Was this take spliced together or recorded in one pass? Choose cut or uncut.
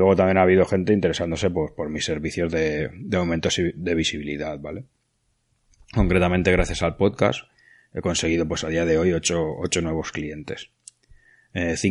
uncut